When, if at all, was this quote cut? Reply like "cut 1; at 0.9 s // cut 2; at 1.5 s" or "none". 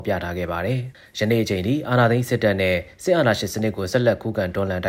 cut 1; at 0.9 s